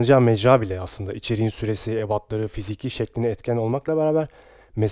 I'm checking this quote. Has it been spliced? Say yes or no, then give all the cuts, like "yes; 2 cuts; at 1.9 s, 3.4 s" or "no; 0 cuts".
no; 0 cuts